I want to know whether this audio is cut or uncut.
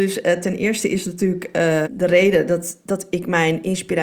cut